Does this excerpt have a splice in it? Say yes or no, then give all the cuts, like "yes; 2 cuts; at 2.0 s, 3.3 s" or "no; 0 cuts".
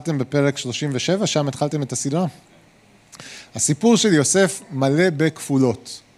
no; 0 cuts